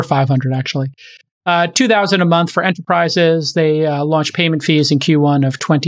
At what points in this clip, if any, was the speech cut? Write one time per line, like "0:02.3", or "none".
none

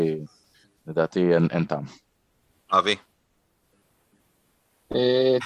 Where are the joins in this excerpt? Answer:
none

